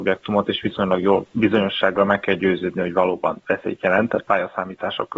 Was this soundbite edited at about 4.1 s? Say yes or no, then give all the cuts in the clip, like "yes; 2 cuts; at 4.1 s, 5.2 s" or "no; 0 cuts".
no; 1 cut; at 1.3 s